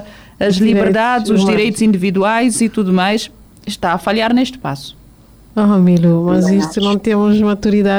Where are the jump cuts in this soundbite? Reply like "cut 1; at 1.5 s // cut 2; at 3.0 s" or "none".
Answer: none

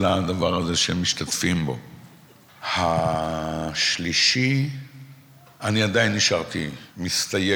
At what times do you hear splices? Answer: none

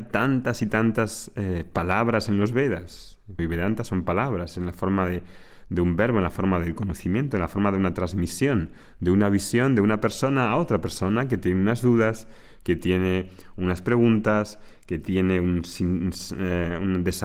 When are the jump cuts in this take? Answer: cut 1; at 3.4 s

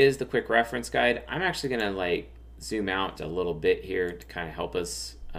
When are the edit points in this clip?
cut 1; at 3.1 s

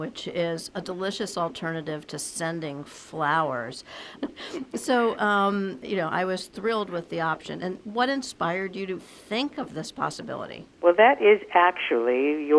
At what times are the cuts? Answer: cut 1; at 4.2 s // cut 2; at 9.0 s // cut 3; at 10.7 s

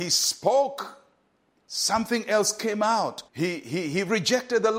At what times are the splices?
cut 1; at 3.3 s

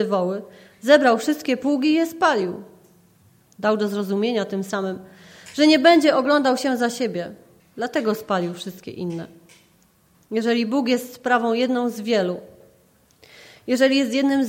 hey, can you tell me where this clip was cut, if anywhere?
cut 1; at 7.6 s // cut 2; at 10.1 s

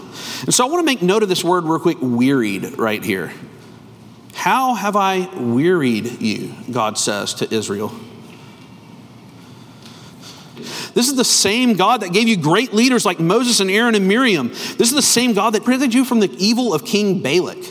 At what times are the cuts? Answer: cut 1; at 10.6 s // cut 2; at 15.6 s

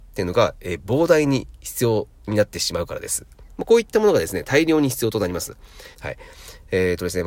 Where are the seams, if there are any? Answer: cut 1; at 3.4 s // cut 2; at 5.9 s

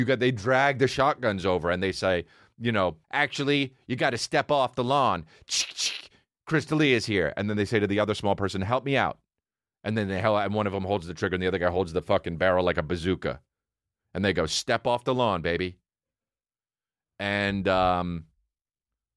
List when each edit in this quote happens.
cut 1; at 3.0 s

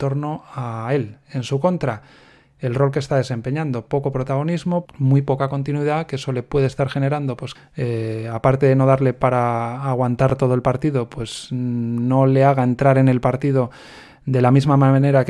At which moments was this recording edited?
cut 1; at 4.9 s // cut 2; at 7.6 s

